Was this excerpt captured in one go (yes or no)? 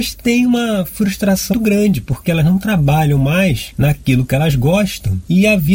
no